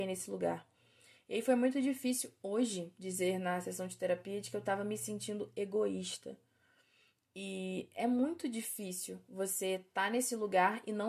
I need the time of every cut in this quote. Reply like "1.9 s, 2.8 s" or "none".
none